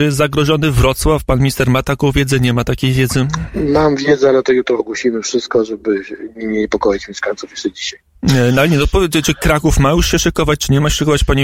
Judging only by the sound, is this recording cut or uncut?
uncut